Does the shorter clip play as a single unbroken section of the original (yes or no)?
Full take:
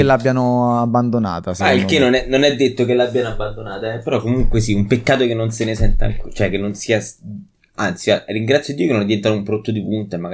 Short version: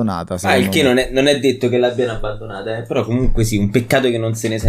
yes